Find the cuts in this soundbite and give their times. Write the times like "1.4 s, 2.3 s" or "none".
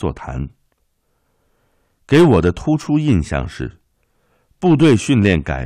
none